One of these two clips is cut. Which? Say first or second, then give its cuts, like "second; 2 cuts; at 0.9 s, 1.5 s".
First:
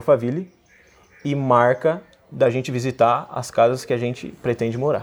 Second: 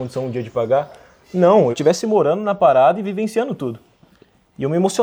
second; 1 cut; at 1.7 s